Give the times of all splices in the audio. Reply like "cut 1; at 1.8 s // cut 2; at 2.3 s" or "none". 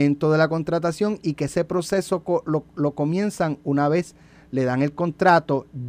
none